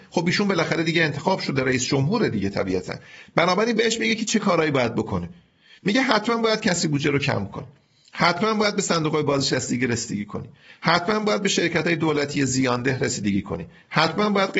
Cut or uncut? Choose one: uncut